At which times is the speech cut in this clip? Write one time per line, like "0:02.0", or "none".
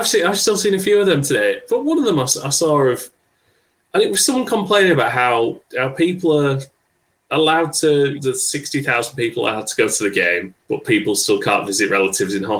0:08.2
0:10.6